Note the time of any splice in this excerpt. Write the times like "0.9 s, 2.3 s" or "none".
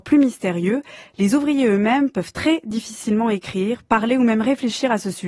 none